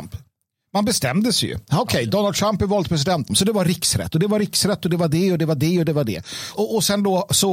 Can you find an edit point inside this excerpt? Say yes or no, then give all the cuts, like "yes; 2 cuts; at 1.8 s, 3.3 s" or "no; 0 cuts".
yes; 2 cuts; at 3.3 s, 6.5 s